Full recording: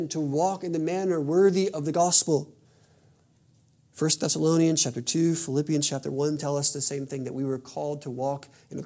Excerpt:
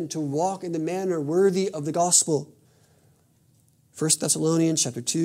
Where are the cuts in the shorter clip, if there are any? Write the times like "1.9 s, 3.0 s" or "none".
none